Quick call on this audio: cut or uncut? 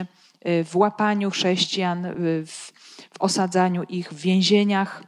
uncut